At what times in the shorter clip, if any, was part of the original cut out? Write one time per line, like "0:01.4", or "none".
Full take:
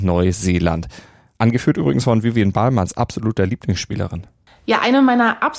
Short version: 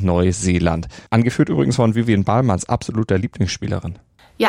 0:01.1